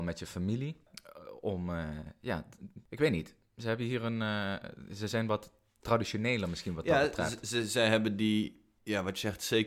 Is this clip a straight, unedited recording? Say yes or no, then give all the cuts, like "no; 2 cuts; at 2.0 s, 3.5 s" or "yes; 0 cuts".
yes; 0 cuts